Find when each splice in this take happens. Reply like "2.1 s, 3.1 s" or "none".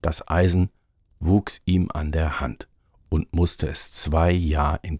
none